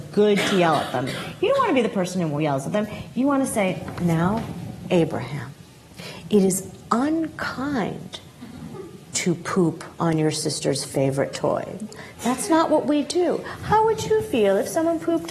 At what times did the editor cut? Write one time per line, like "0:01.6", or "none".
none

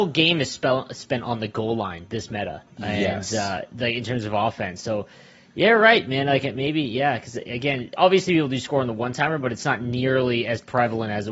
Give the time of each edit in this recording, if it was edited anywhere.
0:02.7

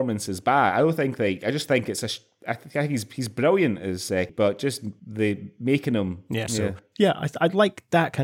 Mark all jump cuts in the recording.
0:04.3
0:06.5

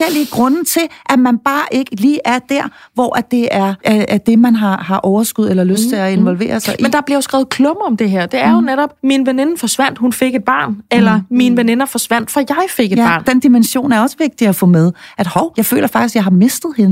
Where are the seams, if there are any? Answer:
0:13.2

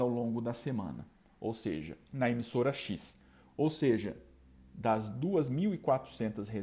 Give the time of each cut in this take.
0:02.1

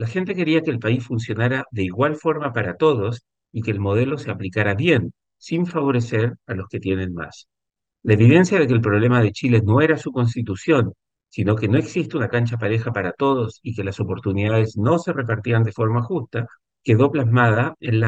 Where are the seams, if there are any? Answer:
none

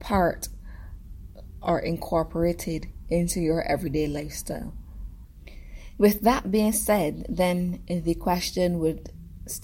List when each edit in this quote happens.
none

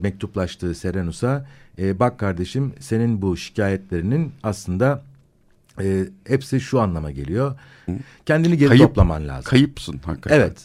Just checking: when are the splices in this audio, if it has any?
0:07.9

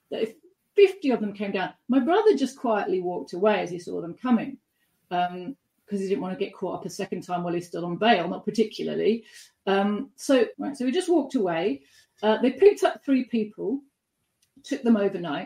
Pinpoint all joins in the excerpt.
0:10.5

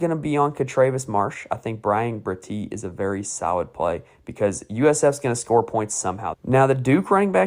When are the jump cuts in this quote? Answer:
0:06.3

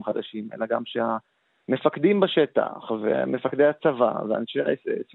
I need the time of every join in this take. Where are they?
none

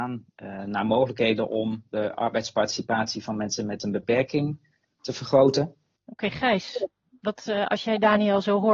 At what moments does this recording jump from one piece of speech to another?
0:06.0

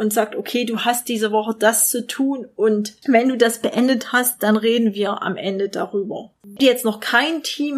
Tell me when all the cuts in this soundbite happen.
0:06.4

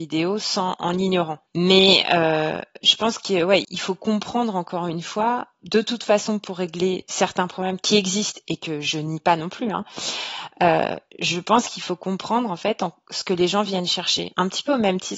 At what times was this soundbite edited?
0:01.5
0:03.6

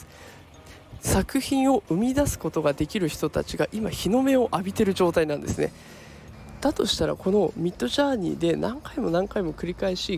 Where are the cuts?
none

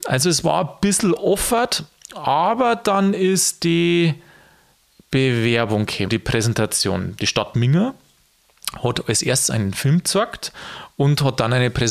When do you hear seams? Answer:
0:06.1

